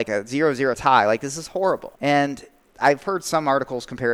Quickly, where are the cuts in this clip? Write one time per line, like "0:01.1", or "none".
0:02.0